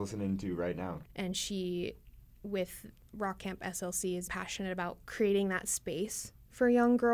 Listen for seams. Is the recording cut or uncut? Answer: cut